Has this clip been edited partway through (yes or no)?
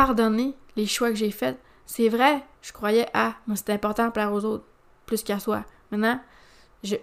yes